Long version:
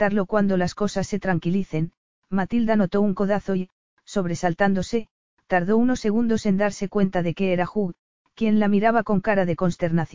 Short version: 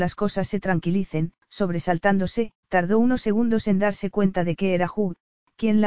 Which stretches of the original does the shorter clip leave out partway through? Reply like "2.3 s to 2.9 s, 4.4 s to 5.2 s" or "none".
2.0 s to 3.9 s, 5.2 s to 5.4 s